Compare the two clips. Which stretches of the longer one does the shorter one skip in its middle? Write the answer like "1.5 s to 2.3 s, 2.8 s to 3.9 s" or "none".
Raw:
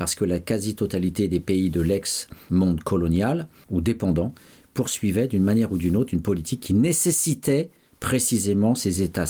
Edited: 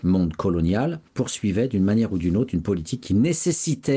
3.5 s to 4.7 s